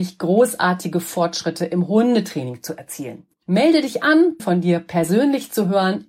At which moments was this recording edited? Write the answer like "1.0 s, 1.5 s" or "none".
3.3 s, 4.4 s